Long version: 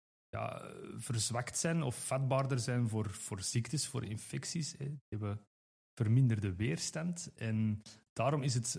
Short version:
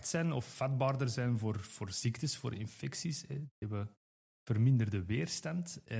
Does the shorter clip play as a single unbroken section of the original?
yes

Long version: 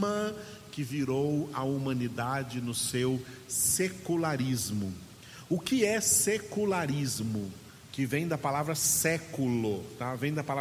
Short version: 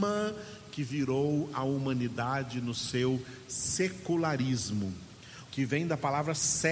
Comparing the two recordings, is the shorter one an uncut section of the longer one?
no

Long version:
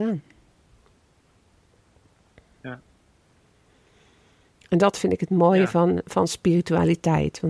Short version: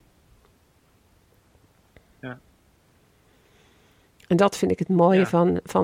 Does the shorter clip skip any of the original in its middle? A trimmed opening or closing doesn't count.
no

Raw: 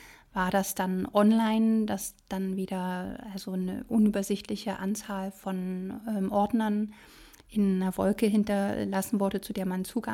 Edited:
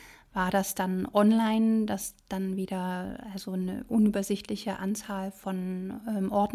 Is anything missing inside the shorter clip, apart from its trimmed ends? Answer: no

